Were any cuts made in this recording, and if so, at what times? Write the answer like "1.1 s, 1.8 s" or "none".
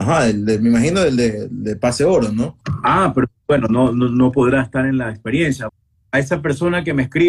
5.7 s